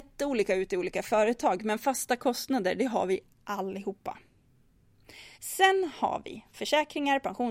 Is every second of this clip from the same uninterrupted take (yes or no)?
no